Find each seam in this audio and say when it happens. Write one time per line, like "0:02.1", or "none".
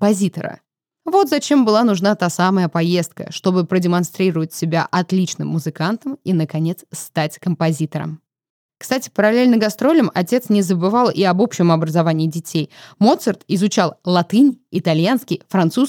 none

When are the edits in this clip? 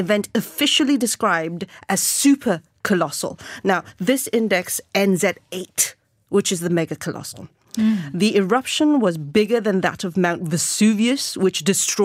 none

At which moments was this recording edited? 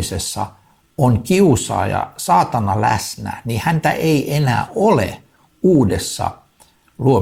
none

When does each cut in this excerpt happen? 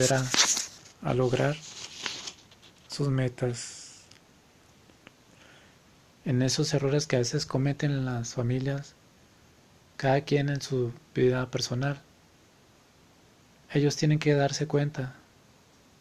0:00.9
0:06.1

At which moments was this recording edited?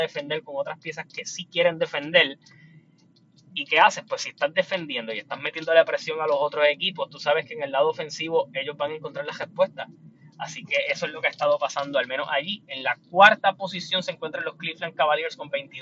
none

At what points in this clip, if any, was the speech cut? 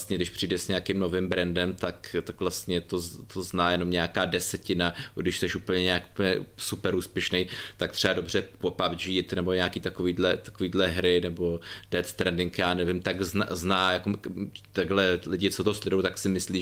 none

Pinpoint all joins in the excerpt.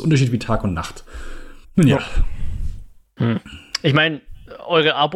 0:01.6

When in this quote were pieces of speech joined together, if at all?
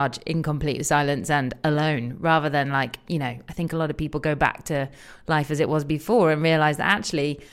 none

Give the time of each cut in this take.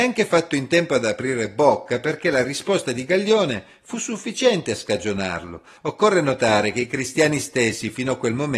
0:05.8

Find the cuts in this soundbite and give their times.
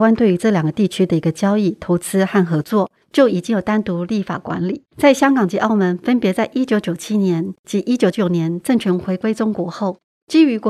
0:04.9
0:08.1

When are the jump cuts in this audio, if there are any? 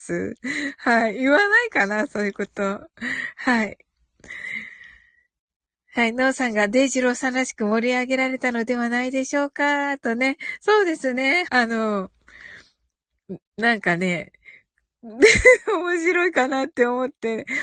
0:11.5

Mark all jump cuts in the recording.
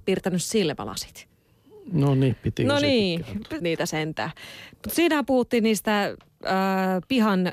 0:03.6
0:04.7

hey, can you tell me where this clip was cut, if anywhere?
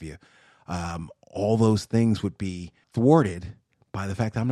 0:02.8

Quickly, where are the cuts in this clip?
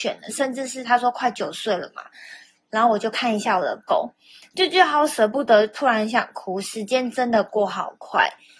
none

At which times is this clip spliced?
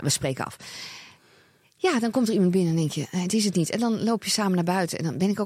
none

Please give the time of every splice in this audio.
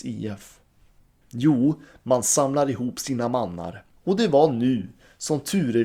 0:01.2
0:04.0

